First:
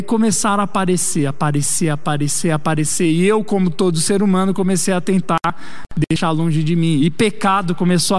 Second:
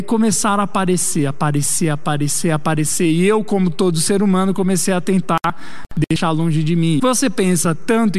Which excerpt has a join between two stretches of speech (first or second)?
second